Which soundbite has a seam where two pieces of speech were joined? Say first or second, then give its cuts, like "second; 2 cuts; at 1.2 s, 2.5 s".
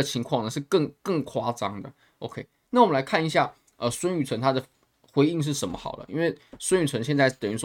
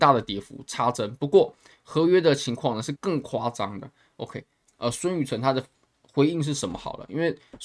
second; 2 cuts; at 3.0 s, 4.7 s